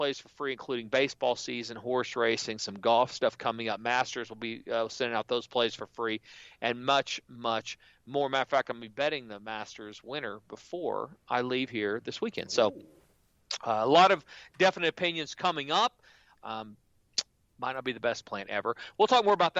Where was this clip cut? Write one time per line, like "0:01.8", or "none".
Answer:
0:16.4